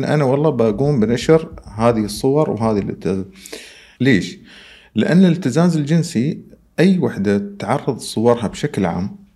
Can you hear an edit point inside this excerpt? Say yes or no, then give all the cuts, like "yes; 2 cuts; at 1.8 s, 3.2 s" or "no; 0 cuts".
yes; 1 cut; at 4.0 s